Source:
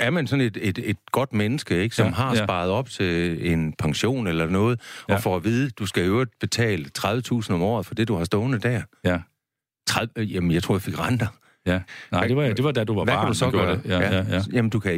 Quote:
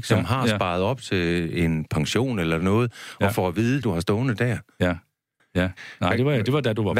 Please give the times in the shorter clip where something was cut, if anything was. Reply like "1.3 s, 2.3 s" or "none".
3.8 s, 5.4 s

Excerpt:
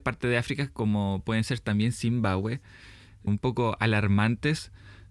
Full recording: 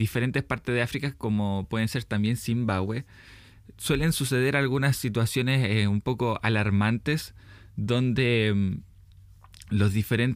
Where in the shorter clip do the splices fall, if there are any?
3.3 s

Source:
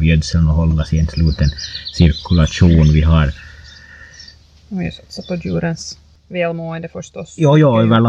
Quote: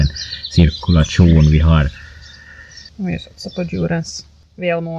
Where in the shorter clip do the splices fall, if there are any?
2.9 s

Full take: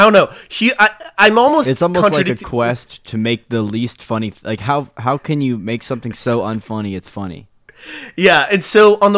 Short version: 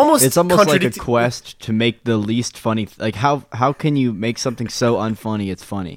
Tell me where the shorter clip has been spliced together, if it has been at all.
none

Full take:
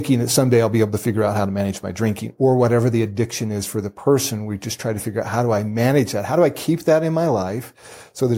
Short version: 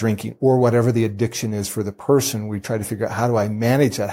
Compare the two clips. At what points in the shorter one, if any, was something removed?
2.6 s

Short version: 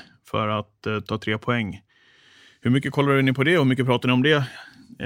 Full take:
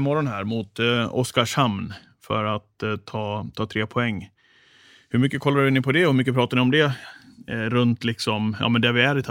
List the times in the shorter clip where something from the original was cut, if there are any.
1.1 s

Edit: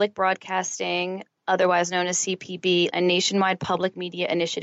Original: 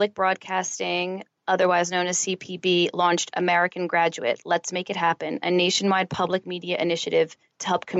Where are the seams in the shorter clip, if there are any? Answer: 2.9 s

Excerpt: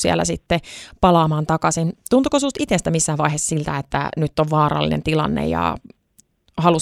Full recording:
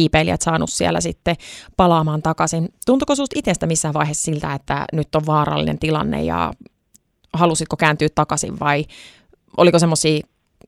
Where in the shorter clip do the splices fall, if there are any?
none

